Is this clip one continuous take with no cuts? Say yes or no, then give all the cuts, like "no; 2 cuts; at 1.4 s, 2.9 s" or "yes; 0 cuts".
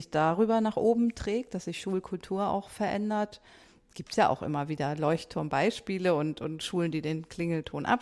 yes; 0 cuts